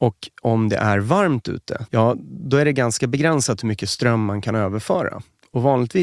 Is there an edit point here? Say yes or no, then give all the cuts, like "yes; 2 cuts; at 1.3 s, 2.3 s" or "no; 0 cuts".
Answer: yes; 1 cut; at 1.9 s